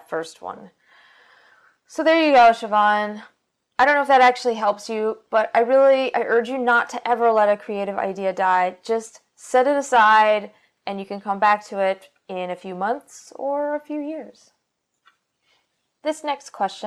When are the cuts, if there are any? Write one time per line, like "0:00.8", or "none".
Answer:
0:10.8